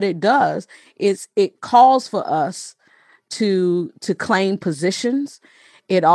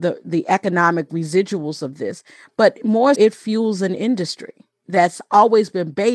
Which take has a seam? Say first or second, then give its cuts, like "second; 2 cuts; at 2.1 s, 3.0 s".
second; 1 cut; at 3.2 s